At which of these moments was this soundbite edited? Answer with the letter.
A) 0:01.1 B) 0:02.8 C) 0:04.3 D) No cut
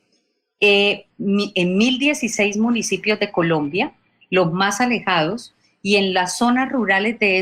A